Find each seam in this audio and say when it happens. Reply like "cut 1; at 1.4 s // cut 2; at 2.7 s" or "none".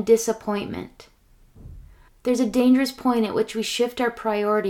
cut 1; at 2.1 s